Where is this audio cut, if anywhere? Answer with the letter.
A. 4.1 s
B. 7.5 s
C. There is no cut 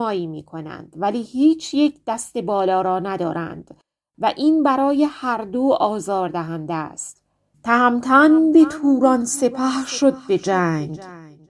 B